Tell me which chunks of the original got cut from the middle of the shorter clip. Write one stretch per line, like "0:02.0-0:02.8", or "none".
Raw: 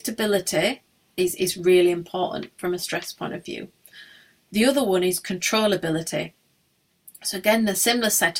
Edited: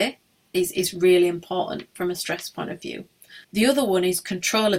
0:04.1-0:04.4

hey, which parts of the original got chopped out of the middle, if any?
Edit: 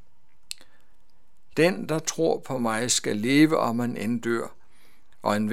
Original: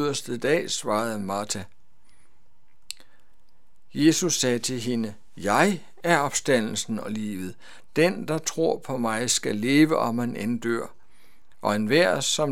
0:03.9-0:07.9

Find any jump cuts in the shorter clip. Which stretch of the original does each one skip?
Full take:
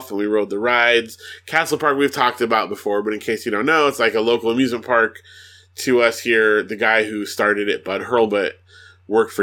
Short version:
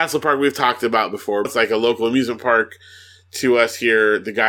0:03.0-0:03.9

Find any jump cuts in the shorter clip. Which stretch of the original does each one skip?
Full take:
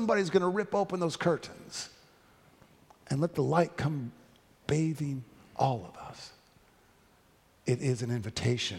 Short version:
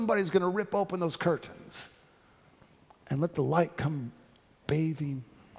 none

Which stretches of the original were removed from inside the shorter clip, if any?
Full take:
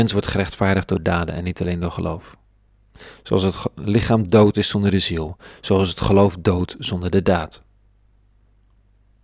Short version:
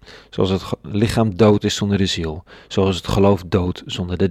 none

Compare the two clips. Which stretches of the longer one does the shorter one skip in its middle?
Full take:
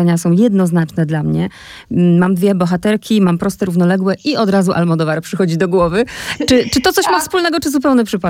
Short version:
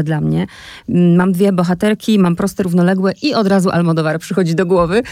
none

